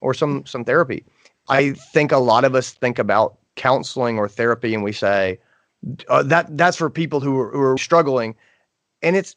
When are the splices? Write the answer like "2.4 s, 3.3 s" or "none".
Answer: 1.3 s, 7.8 s